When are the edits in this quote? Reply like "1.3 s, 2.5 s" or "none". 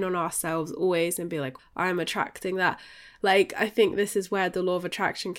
1.6 s